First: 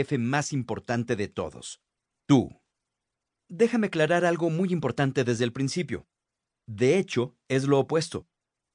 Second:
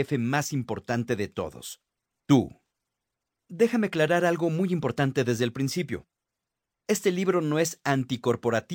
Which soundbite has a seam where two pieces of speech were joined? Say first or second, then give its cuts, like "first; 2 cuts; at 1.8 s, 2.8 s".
first; 1 cut; at 6.6 s